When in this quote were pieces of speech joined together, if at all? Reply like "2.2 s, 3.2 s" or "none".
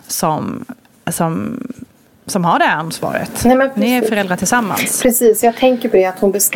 none